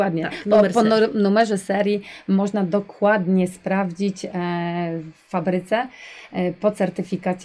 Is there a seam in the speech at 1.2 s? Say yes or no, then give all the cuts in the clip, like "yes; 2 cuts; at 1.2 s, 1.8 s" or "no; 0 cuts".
no; 0 cuts